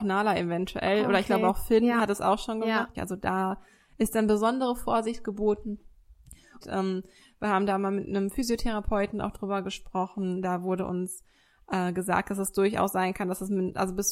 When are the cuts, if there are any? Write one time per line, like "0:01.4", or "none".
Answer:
0:02.9
0:06.6